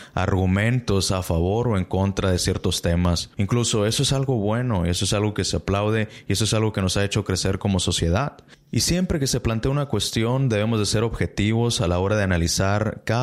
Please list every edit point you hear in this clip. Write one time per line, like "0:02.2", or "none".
none